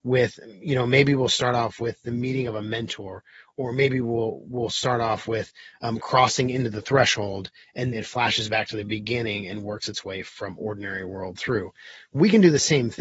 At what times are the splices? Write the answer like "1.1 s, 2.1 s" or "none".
7.9 s

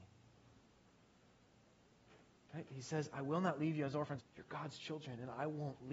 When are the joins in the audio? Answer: 4.2 s

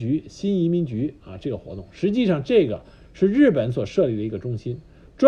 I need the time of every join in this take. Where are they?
none

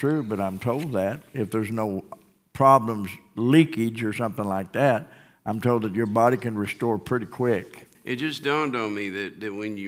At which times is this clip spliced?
7.9 s

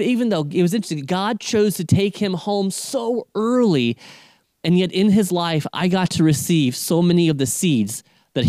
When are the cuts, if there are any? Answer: none

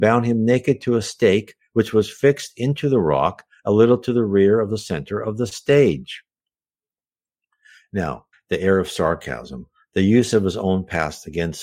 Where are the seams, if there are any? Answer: 8.3 s

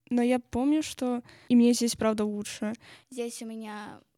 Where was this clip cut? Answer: 1.5 s, 3.0 s

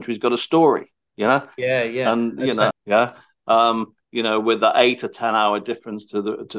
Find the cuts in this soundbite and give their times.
2.7 s

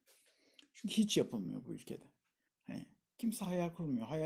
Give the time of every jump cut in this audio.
2.5 s

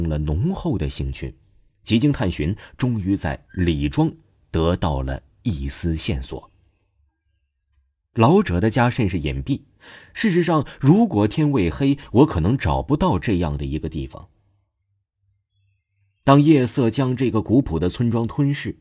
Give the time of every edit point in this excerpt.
none

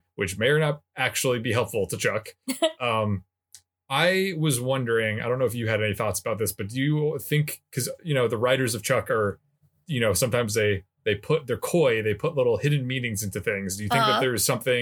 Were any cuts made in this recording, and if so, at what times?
none

